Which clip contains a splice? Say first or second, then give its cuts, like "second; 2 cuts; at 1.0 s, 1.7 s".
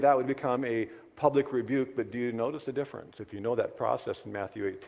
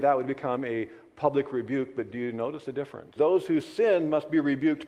second; 1 cut; at 3.2 s